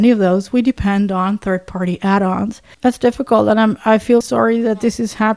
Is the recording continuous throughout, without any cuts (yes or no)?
no